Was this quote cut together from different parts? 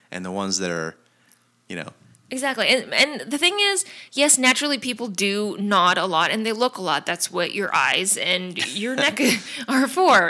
no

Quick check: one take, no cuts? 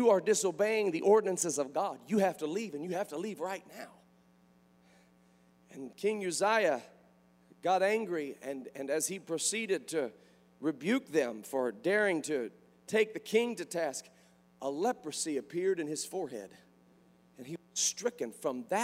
yes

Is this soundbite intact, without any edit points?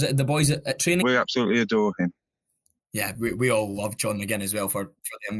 no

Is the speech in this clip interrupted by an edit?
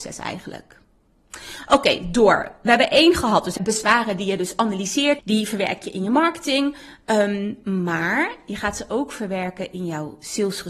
yes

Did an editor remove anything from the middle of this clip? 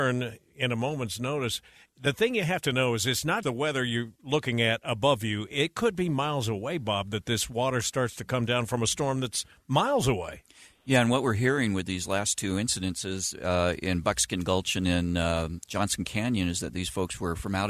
yes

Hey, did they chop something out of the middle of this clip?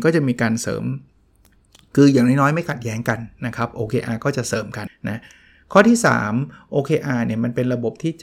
yes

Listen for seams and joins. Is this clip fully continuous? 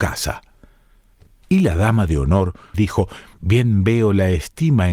no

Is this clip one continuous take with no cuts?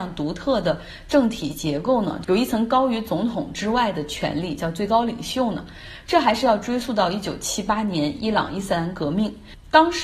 yes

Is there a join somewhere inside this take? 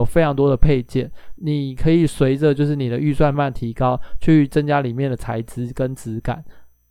yes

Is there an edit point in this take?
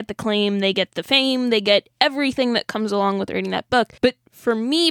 yes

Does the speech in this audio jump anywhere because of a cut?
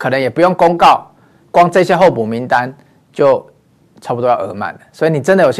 no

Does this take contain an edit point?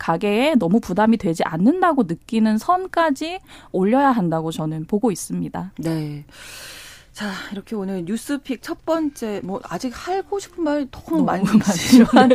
no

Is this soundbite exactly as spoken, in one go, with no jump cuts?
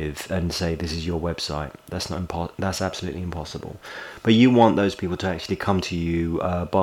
yes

